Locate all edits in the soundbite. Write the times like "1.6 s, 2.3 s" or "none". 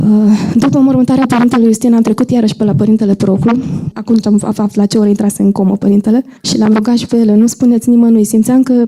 3.9 s, 6.4 s